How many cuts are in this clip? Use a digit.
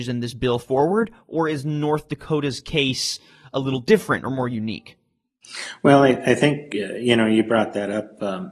0